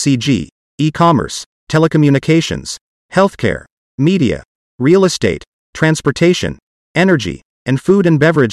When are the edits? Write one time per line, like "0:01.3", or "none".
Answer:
none